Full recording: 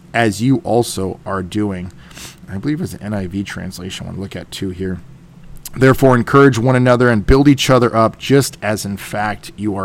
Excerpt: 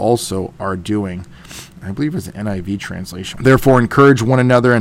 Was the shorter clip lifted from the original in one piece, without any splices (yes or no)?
no